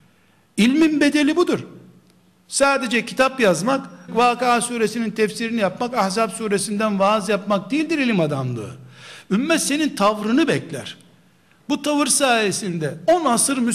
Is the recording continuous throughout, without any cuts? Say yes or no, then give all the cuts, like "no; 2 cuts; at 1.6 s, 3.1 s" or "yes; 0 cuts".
no; 1 cut; at 4.1 s